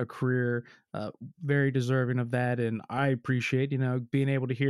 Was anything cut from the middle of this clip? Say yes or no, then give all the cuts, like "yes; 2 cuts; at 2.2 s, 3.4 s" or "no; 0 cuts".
no; 0 cuts